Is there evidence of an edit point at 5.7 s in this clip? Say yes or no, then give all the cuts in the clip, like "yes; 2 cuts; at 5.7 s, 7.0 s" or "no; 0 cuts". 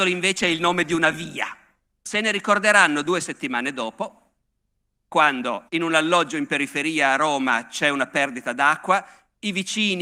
yes; 2 cuts; at 2.0 s, 5.7 s